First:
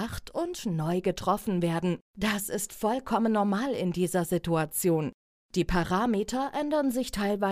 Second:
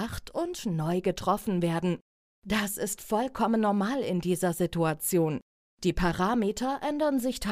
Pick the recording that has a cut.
first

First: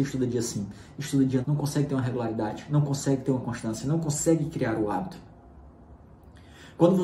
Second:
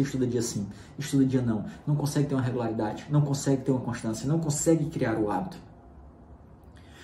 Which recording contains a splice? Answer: first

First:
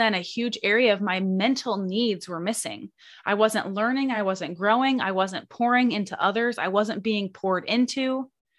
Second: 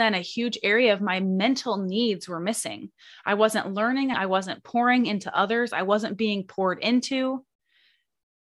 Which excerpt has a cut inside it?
second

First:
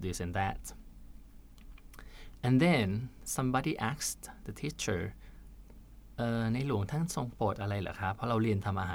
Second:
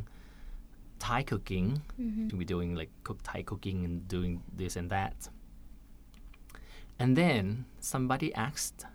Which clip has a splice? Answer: second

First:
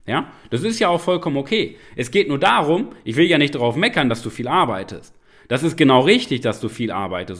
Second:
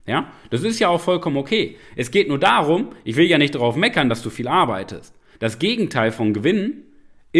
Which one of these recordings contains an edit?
second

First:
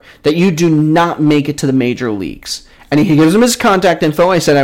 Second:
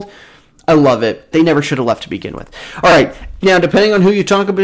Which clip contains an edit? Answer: second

